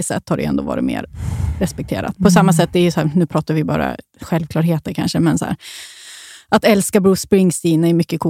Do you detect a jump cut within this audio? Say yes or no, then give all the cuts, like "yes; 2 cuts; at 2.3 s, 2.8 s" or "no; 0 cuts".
no; 0 cuts